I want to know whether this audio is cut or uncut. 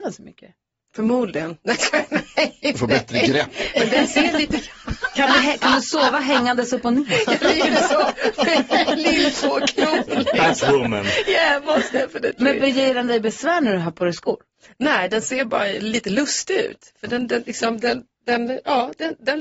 uncut